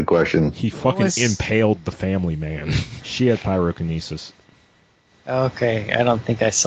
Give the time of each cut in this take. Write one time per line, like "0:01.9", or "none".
0:03.0

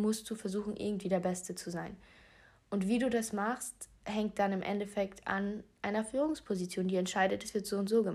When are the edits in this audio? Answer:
none

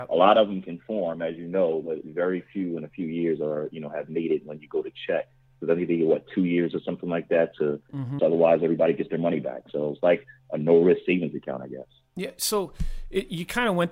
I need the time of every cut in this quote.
0:08.2

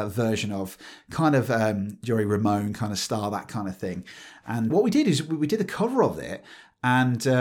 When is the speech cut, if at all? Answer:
0:04.7

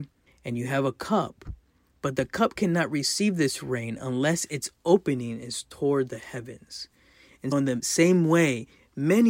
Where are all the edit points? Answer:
0:07.5

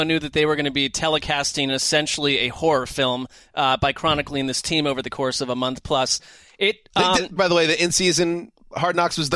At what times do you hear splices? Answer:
0:07.4

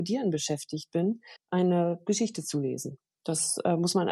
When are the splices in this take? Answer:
0:01.4

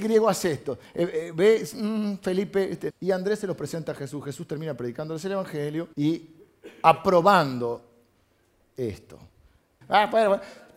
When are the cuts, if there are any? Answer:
0:02.9
0:05.9
0:09.8

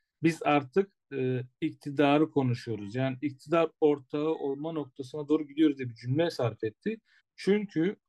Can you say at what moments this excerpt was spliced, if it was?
0:07.2

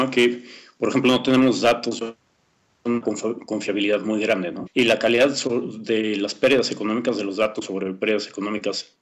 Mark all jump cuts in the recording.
0:04.7

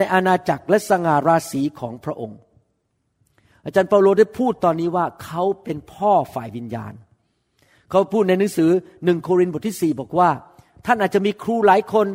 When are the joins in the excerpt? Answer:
none

